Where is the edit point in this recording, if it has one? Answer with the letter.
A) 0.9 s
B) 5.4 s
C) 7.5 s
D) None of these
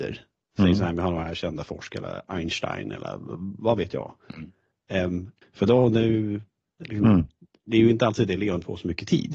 B